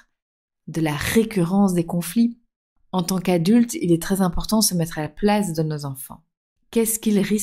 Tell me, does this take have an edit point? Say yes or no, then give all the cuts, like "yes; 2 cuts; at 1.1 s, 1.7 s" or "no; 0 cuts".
no; 0 cuts